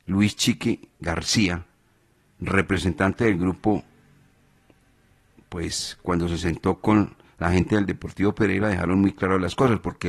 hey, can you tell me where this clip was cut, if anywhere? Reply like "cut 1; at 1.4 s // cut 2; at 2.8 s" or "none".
none